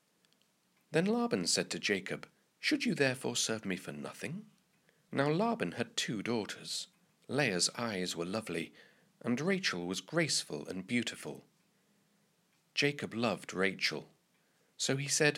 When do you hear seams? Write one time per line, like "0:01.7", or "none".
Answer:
0:02.4
0:05.1
0:07.1